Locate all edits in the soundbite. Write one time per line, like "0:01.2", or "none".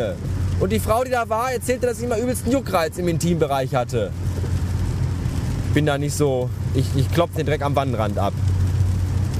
0:05.6
0:07.3